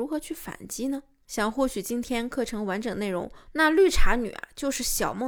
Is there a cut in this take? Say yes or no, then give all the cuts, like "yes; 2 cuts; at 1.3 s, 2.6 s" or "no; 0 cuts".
yes; 1 cut; at 3.5 s